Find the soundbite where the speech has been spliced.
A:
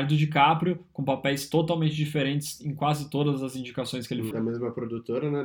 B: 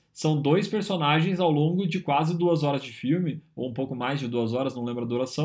A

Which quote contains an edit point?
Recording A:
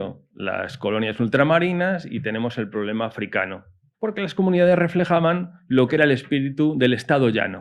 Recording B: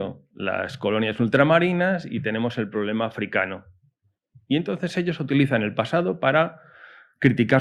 A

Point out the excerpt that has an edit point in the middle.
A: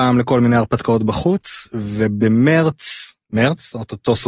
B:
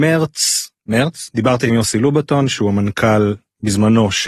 B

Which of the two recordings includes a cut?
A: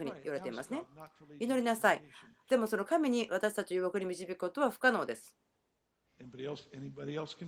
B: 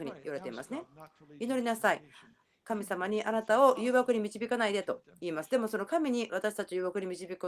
A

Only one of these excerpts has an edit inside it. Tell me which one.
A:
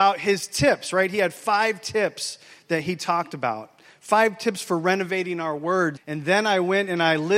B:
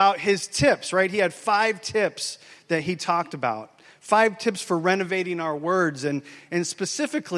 A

